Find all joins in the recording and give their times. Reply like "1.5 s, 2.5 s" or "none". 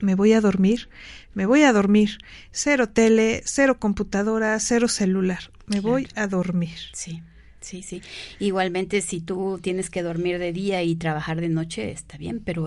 none